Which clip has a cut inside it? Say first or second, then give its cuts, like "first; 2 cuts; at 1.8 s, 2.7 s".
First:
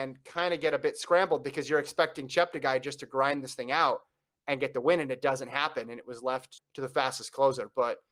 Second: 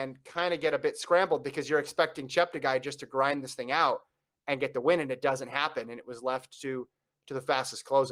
first; 1 cut; at 6.6 s